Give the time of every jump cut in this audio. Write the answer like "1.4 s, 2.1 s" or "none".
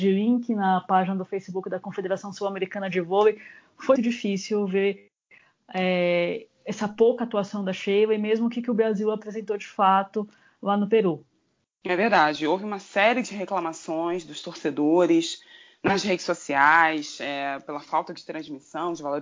4.0 s